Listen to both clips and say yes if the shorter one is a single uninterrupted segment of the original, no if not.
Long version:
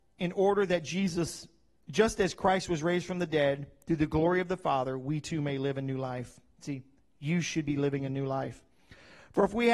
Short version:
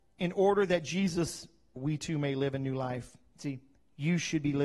no